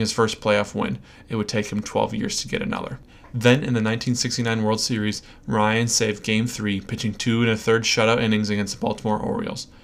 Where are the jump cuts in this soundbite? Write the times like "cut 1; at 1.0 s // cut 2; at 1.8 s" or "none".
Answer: none